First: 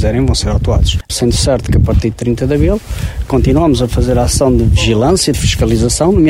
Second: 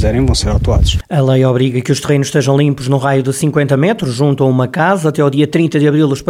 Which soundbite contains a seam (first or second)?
first